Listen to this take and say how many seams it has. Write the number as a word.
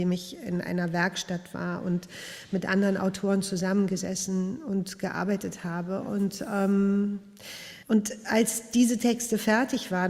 one